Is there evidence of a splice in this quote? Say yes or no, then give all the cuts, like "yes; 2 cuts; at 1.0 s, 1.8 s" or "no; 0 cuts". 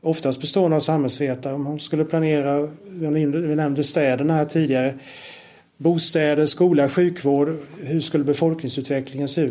no; 0 cuts